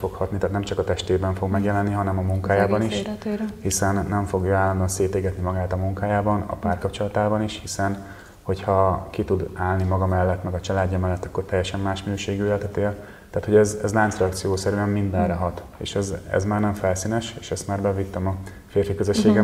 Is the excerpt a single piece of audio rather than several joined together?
yes; 0 cuts

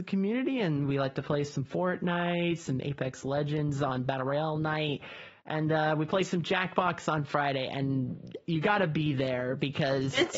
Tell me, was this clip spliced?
yes; 1 cut; at 8.5 s

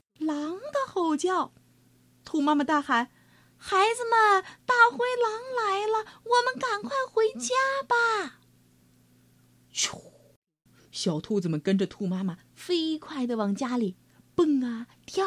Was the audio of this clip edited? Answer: no; 0 cuts

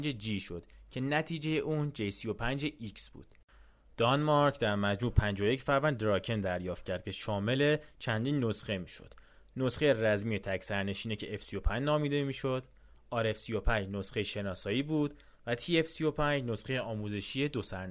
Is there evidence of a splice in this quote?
no; 0 cuts

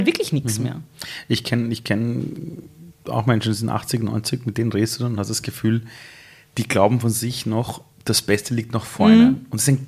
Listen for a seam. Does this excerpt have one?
yes; 1 cut; at 7.9 s

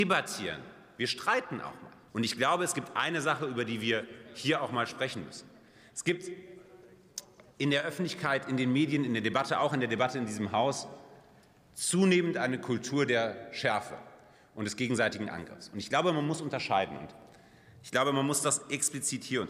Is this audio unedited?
no; 1 cut; at 2.1 s

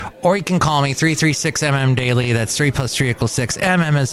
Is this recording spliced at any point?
no; 0 cuts

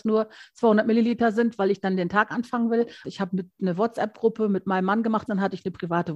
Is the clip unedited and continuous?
no; 2 cuts; at 3.0 s, 5.3 s

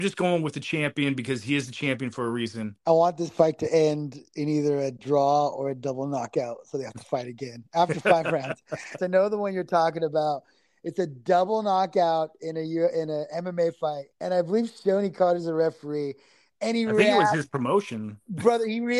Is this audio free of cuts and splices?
no; 3 cuts; at 2.8 s, 9.0 s, 14.1 s

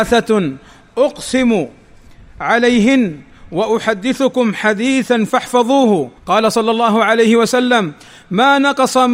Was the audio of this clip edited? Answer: yes; 1 cut; at 6.2 s

